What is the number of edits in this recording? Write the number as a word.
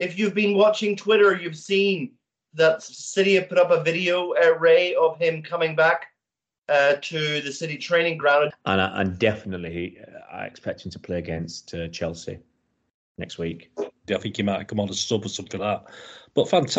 three